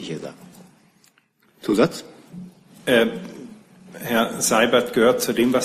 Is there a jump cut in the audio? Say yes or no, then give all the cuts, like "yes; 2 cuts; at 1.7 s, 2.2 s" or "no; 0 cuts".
no; 0 cuts